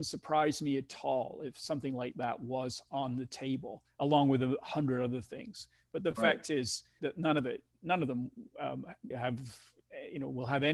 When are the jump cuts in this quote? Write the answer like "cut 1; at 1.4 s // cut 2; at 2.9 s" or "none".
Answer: cut 1; at 7.0 s // cut 2; at 9.1 s